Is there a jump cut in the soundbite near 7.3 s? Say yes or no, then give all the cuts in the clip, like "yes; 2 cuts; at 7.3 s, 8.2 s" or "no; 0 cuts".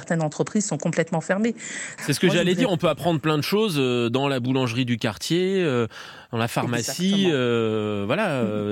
no; 1 cut; at 2.0 s